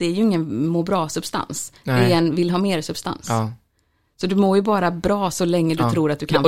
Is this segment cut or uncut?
uncut